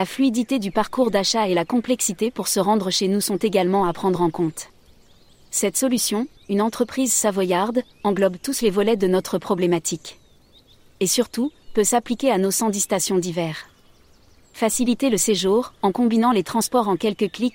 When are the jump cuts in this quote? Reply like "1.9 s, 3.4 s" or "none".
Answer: 6.4 s

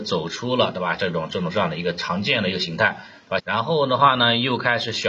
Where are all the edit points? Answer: 1.0 s, 3.4 s

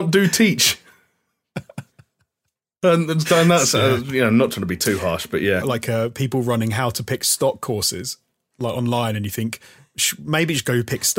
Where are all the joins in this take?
5.6 s

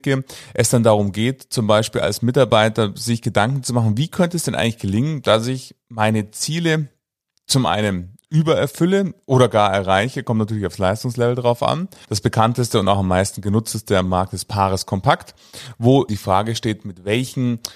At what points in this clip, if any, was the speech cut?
12.0 s, 16.1 s

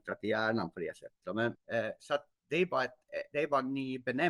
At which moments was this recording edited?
1.5 s

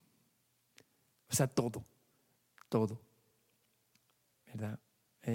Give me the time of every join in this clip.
none

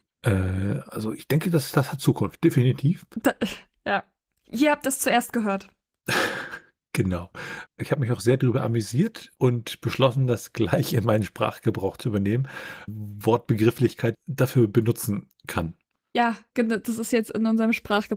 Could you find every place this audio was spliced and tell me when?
7.7 s, 12.9 s, 14.1 s

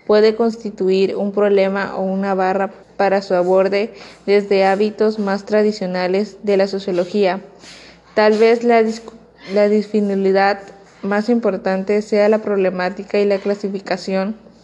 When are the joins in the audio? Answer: 2.8 s

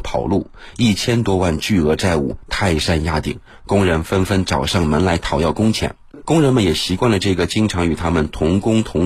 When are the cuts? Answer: 6.2 s

